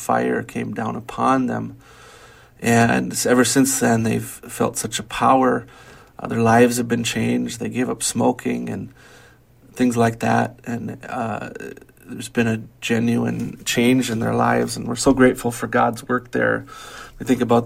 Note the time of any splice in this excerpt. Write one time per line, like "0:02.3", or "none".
none